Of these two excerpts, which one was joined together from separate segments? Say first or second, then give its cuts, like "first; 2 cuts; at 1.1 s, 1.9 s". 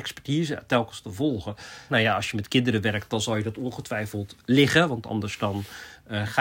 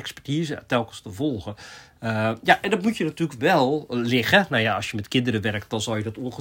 first; 1 cut; at 1.9 s